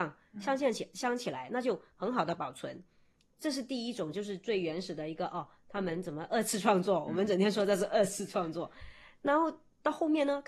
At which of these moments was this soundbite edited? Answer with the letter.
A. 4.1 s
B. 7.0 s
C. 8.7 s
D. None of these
D